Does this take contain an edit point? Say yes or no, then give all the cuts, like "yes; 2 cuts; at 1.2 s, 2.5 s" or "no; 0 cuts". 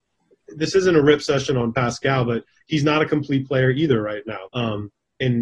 yes; 1 cut; at 4.5 s